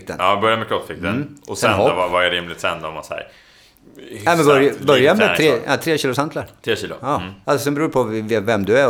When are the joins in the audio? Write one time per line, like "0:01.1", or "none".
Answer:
0:07.4